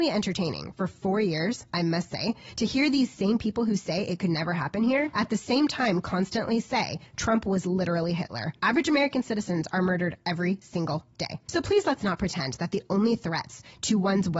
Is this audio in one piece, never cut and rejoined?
no; 2 cuts; at 5.1 s, 8.6 s

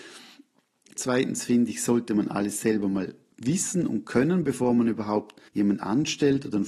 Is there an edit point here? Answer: yes; 2 cuts; at 1.0 s, 5.5 s

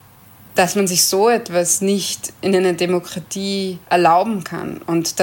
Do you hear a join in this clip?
yes; 1 cut; at 3.8 s

